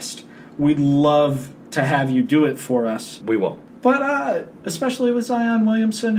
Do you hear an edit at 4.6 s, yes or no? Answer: yes